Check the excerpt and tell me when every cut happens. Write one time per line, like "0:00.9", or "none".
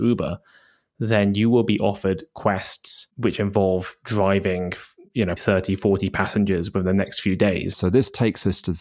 0:05.4
0:07.7

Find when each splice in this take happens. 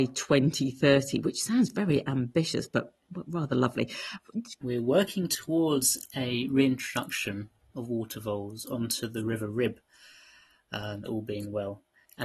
0:04.6
0:11.1

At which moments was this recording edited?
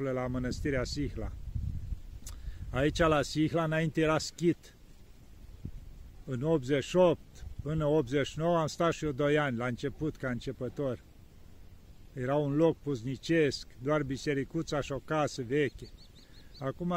none

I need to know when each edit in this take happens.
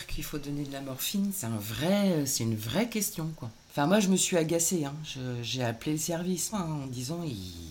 0:03.6
0:06.5

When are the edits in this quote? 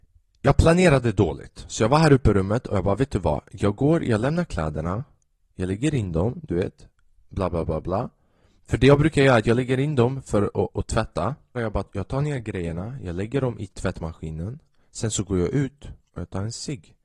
0:11.5
0:13.7

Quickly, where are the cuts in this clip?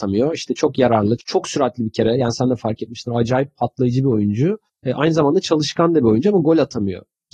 0:01.2

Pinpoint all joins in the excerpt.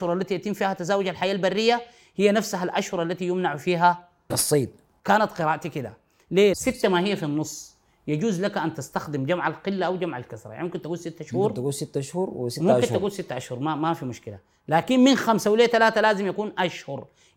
0:04.3
0:06.5

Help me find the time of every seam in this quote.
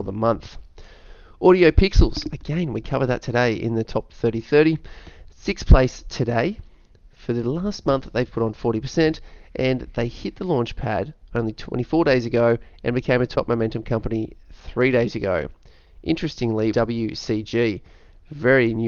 0:16.7

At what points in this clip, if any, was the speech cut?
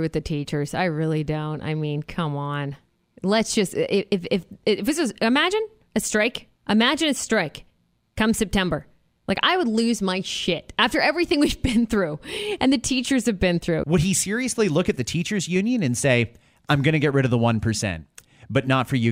0:06.6
0:13.8

